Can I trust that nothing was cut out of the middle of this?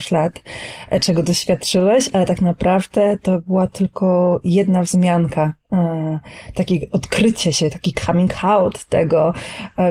yes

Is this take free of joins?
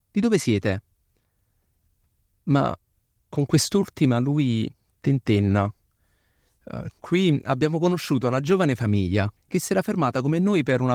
no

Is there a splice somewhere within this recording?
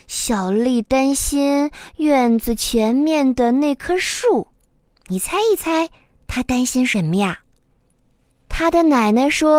yes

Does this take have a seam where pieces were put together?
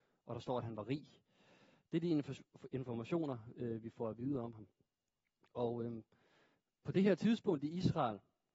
no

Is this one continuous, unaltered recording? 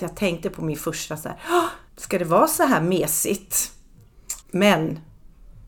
no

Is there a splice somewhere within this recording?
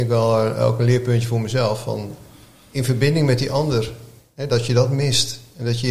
no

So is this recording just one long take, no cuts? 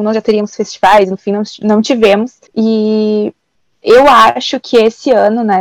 no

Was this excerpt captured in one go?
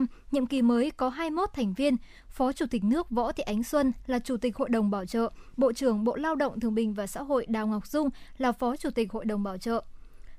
yes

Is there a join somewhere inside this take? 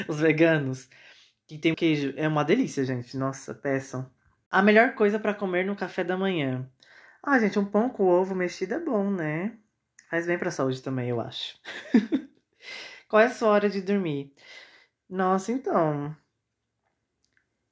yes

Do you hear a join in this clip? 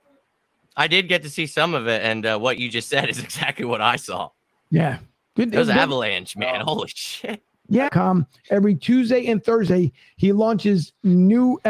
yes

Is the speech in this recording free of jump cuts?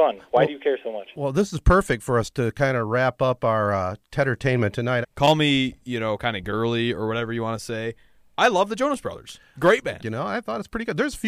no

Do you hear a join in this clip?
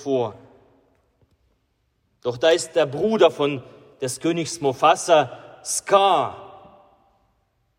no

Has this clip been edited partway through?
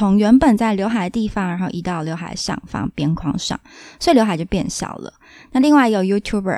no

